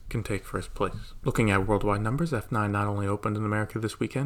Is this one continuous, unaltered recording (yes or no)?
yes